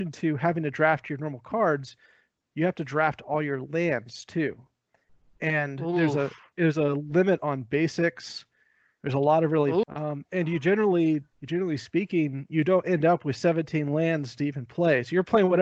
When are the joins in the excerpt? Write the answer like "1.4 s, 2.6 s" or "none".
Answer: 9.8 s, 11.3 s